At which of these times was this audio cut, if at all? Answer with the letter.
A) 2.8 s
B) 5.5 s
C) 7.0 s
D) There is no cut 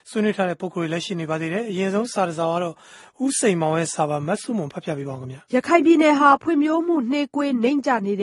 B